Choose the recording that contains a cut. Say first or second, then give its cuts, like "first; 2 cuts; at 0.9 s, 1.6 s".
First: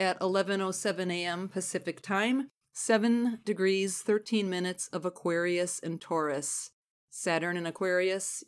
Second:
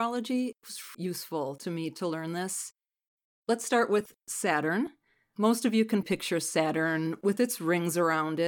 second; 2 cuts; at 0.9 s, 6.0 s